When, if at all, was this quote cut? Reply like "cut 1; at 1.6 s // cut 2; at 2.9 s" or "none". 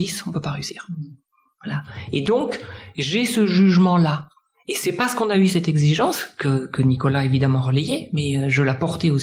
none

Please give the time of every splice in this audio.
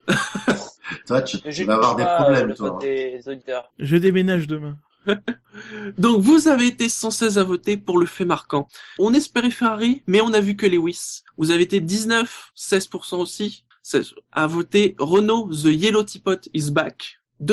cut 1; at 9.0 s

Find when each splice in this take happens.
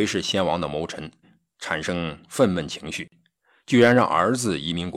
cut 1; at 1.2 s

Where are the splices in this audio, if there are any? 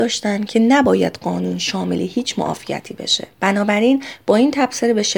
cut 1; at 3.3 s

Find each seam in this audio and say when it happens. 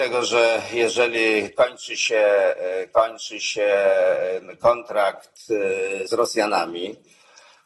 cut 1; at 6.1 s

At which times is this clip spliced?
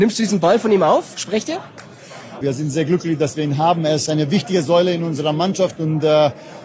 cut 1; at 2.4 s

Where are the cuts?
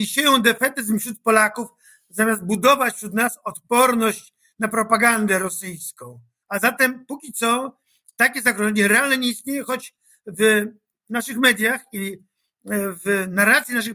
cut 1; at 6.4 s

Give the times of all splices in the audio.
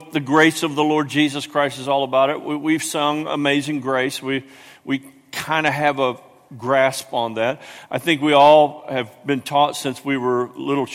none

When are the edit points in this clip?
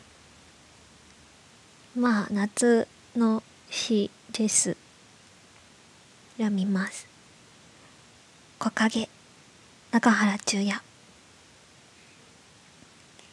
none

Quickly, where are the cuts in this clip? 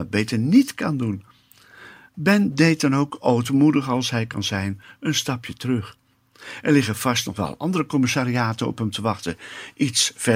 none

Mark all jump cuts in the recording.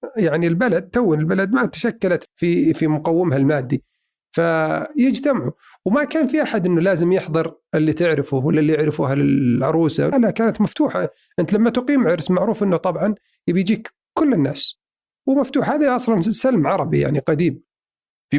cut 1; at 2.3 s // cut 2; at 10.1 s

